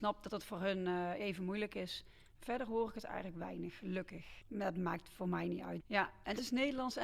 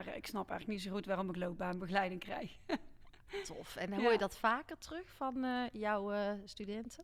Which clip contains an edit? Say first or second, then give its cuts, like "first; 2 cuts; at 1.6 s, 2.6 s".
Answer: first; 2 cuts; at 4.4 s, 5.8 s